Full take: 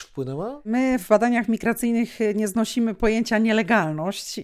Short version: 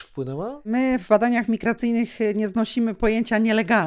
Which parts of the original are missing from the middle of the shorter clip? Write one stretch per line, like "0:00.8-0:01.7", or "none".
none